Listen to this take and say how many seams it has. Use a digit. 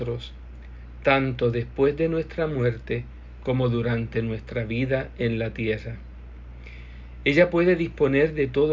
0